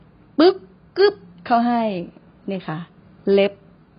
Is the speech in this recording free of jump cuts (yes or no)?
yes